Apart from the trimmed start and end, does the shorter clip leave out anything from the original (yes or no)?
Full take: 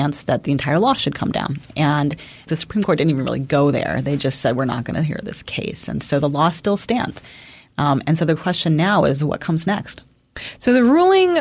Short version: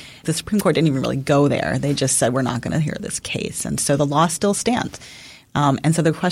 no